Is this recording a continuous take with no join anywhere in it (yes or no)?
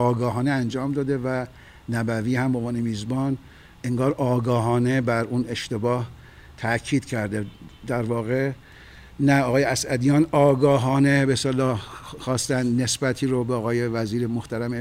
yes